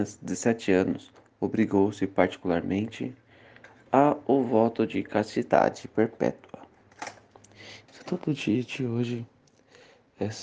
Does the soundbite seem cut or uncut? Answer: cut